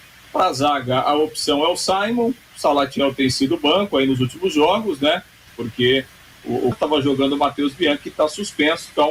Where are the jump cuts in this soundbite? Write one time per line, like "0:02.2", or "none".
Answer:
0:05.5
0:06.7